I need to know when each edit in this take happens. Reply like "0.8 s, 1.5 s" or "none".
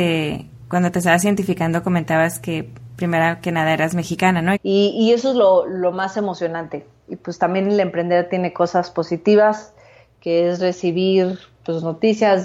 4.6 s